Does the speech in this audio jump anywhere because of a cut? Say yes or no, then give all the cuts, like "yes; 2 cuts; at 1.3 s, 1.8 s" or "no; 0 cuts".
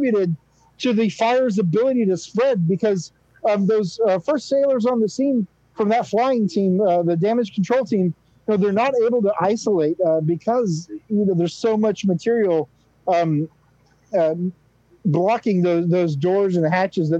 no; 0 cuts